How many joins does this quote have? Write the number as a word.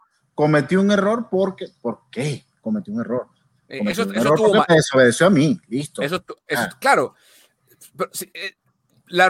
zero